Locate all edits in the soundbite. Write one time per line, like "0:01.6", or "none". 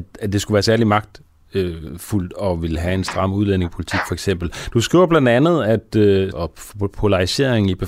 0:04.7
0:06.3

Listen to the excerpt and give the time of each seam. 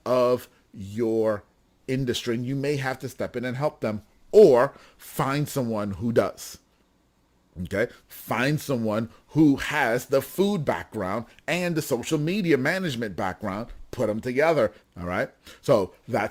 0:08.0
0:14.8

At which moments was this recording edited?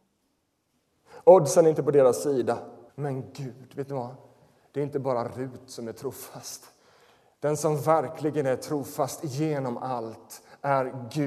0:02.9

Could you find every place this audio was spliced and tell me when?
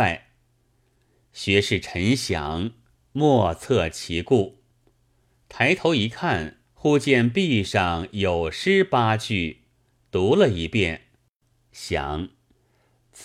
0:06.7

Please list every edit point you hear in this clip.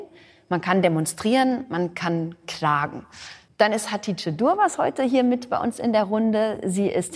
0:03.5

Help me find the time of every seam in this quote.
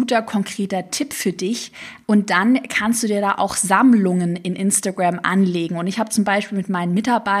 0:02.0

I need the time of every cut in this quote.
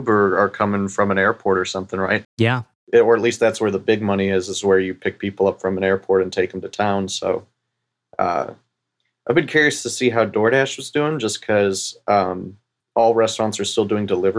0:02.2

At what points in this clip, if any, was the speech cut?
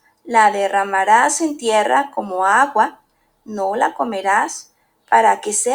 none

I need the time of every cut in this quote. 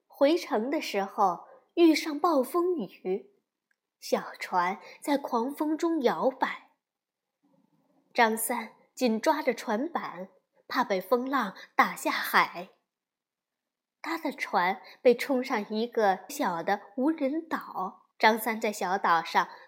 0:16.3
0:18.1

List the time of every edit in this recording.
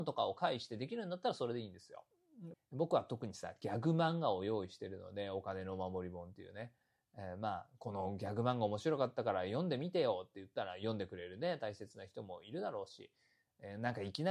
0:02.5

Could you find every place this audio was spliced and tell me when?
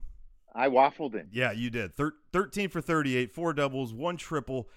none

